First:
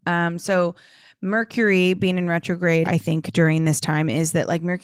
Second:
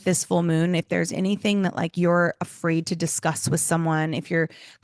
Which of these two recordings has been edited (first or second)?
first